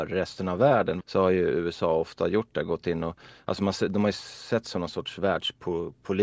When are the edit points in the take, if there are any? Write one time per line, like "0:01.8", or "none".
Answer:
0:01.0